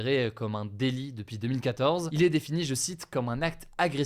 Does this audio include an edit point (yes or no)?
no